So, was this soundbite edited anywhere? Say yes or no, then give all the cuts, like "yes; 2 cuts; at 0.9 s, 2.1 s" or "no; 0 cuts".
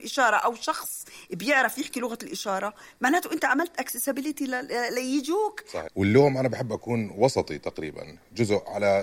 yes; 1 cut; at 5.9 s